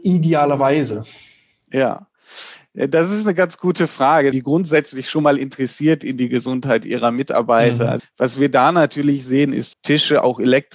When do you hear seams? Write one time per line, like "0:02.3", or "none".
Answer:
0:04.3
0:08.0
0:09.7